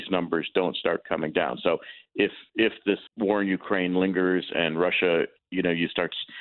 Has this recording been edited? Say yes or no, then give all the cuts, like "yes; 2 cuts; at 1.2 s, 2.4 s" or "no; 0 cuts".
yes; 1 cut; at 3.1 s